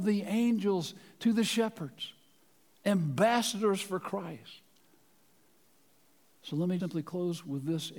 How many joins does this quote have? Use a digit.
1